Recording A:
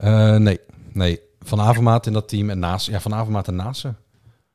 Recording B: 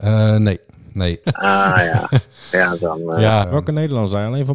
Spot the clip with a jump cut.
B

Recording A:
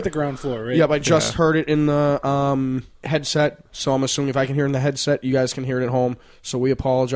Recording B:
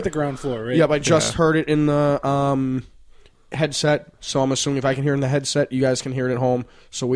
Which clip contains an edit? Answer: A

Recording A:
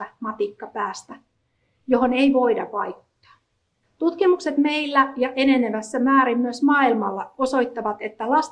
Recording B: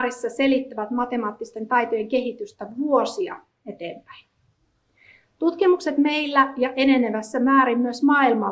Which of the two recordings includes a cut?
A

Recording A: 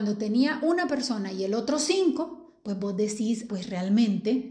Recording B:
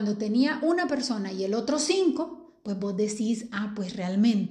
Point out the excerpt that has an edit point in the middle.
A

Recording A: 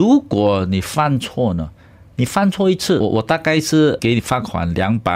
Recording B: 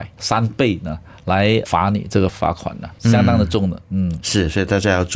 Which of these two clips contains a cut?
B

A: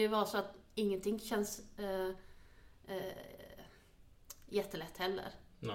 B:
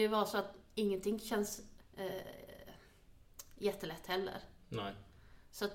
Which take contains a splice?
B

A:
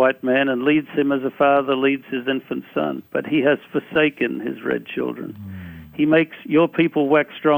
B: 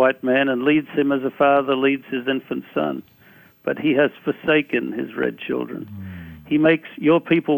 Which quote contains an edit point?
A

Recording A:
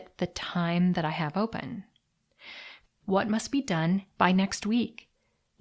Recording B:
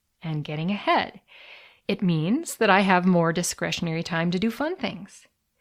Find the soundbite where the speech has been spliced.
A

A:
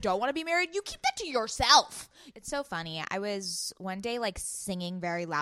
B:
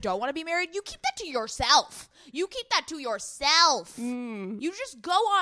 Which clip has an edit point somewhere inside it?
A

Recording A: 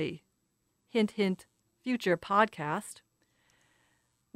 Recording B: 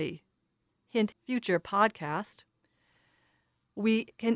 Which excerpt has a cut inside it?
B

